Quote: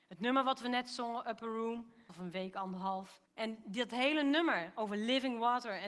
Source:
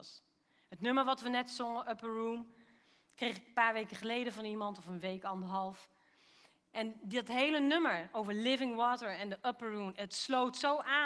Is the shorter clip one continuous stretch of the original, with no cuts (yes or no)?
no